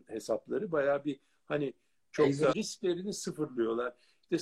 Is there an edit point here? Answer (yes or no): yes